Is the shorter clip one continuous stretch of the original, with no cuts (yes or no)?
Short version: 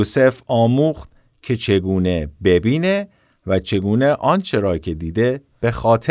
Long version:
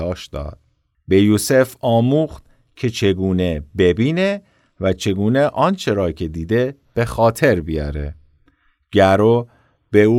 yes